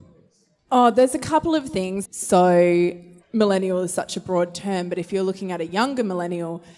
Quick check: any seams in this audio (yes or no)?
yes